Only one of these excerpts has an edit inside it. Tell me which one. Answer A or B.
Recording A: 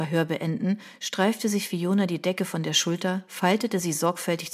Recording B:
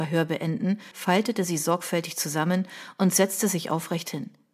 B